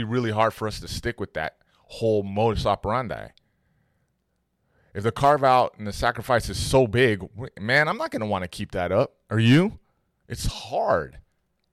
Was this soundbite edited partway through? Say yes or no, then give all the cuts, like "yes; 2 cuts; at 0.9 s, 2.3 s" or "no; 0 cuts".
no; 0 cuts